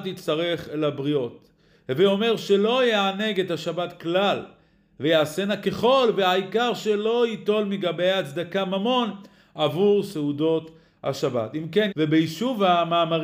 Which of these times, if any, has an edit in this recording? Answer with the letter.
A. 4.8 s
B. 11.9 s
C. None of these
B